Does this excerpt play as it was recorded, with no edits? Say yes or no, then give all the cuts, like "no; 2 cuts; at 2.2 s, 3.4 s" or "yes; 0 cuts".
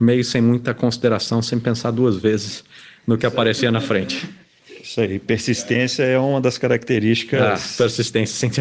yes; 0 cuts